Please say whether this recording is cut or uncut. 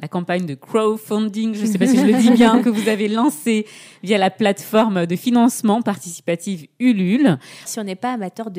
cut